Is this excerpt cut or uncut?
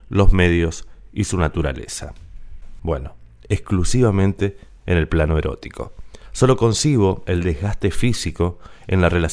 cut